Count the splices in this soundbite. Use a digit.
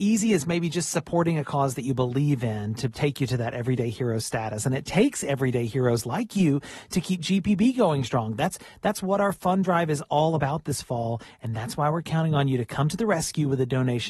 0